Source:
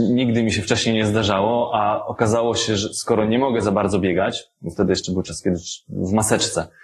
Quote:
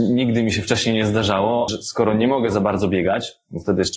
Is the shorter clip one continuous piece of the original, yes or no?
no